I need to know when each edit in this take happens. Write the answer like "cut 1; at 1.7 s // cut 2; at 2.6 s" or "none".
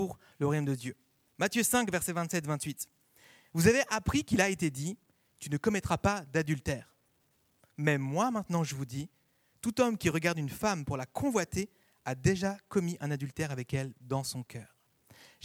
none